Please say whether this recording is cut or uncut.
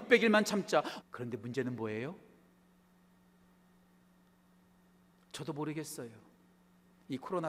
cut